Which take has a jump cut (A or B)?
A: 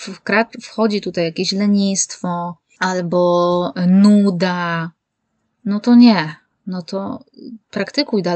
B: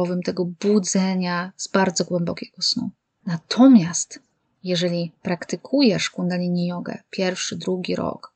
B